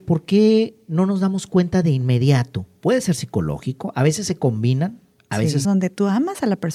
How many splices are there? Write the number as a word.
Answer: two